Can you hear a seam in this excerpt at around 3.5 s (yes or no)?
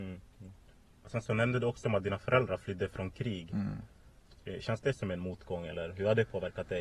no